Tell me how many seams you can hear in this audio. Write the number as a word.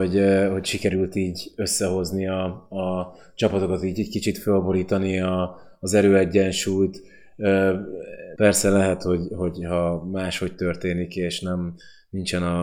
one